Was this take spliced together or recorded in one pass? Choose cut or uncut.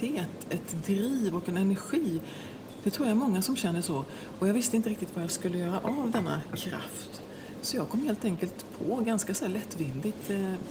uncut